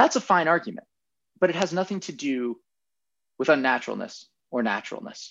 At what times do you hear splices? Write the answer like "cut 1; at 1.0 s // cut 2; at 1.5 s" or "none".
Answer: none